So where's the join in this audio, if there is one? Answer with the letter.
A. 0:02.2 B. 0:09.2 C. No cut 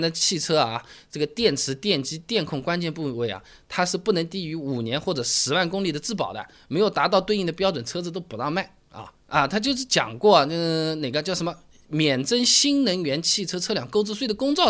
B